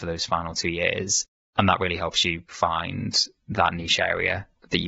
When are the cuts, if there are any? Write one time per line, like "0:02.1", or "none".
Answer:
0:02.5